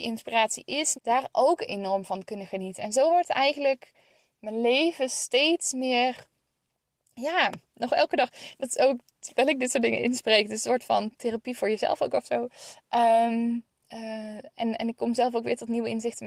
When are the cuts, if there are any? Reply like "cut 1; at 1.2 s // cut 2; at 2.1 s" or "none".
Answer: cut 1; at 0.9 s